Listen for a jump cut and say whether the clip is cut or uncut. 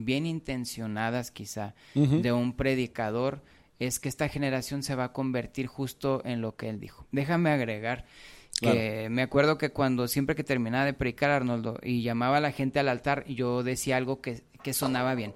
uncut